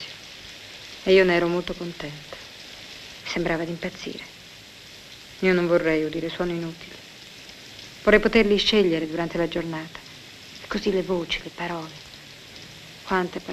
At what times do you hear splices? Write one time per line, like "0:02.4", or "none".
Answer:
0:03.2